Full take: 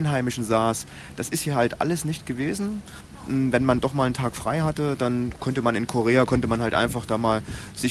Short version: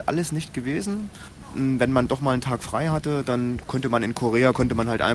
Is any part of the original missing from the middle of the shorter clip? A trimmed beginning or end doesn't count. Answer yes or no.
no